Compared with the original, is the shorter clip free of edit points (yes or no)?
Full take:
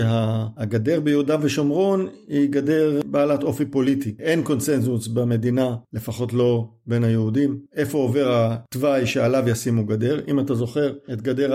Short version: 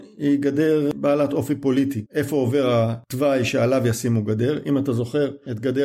no